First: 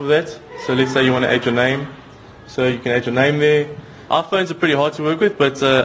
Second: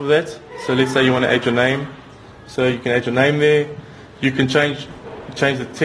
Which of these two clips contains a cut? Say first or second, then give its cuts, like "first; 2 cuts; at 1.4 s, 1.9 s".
first; 1 cut; at 4.1 s